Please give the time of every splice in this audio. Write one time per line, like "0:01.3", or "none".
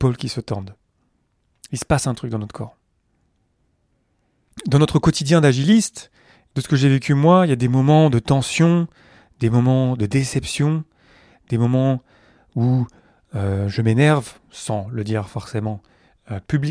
none